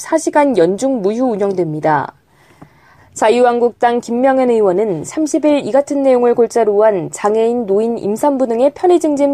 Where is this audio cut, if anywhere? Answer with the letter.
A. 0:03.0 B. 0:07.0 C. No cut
A